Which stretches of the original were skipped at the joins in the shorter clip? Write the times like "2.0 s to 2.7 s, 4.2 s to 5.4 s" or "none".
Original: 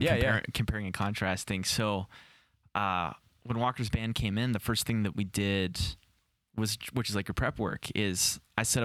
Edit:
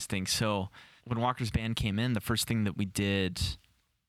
2.4 s to 3.4 s

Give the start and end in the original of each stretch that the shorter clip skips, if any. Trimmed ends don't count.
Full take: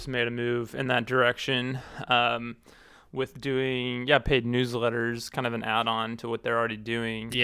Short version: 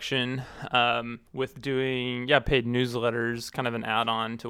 2.6 s to 3.1 s

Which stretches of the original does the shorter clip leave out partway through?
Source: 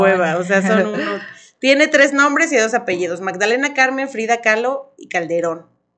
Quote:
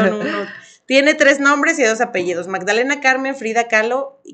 none

